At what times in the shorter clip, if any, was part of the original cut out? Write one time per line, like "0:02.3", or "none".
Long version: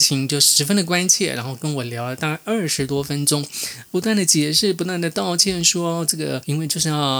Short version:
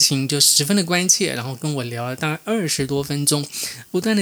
none